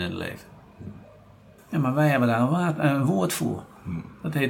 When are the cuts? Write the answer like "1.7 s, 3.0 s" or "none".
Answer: 1.6 s